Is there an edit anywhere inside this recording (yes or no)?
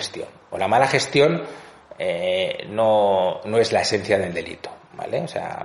no